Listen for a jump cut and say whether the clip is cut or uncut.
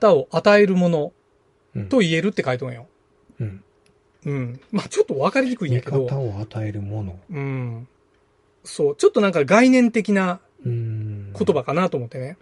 uncut